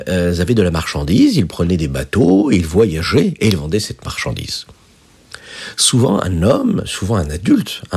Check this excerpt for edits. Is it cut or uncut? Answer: uncut